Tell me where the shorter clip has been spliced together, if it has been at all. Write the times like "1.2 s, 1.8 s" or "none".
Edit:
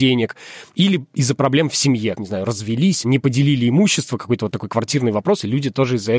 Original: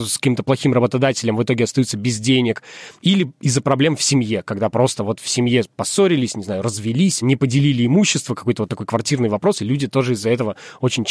2.2 s